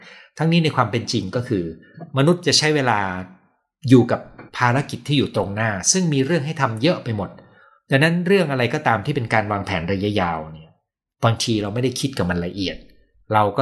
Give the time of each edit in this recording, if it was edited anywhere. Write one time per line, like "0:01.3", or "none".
none